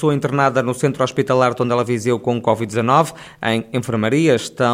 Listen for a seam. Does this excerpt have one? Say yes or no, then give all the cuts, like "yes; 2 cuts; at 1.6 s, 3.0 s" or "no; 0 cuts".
no; 0 cuts